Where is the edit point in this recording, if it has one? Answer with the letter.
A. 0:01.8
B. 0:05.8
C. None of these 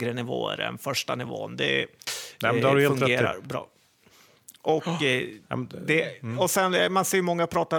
C